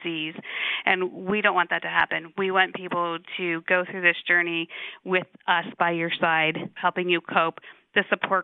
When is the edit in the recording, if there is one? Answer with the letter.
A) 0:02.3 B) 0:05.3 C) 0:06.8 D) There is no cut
C